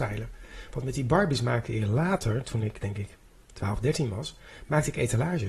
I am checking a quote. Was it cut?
no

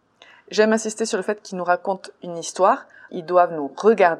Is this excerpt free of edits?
no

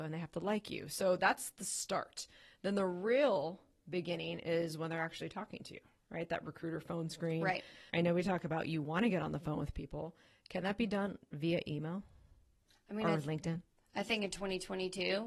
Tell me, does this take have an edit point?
yes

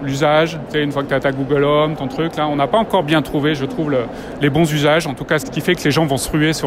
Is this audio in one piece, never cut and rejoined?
no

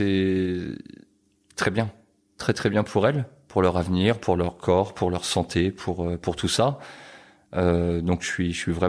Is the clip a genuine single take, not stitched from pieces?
yes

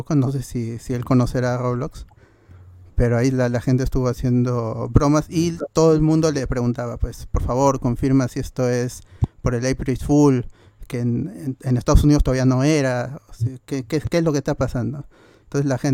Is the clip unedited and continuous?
yes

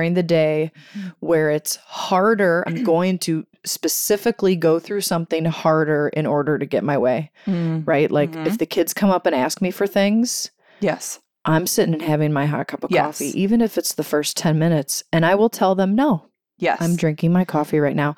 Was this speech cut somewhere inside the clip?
no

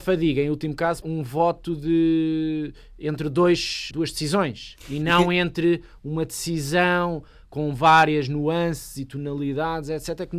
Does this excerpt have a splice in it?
yes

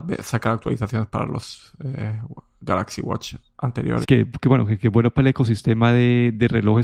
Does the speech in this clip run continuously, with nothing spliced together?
no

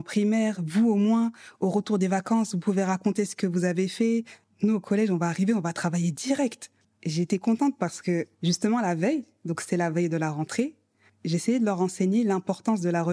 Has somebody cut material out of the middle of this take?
yes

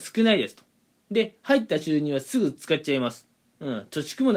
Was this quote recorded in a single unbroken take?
no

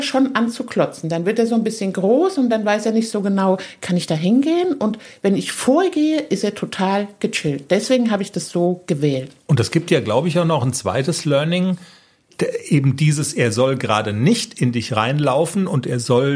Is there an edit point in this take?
no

